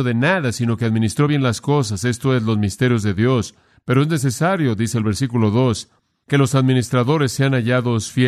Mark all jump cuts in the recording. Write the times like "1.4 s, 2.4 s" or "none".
none